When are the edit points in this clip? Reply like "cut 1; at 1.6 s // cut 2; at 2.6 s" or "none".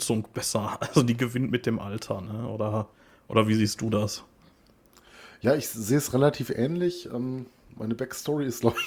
none

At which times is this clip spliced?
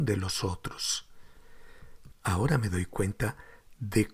cut 1; at 2.1 s

